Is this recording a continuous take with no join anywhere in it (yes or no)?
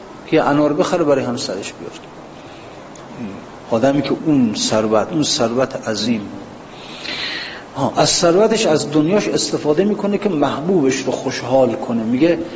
no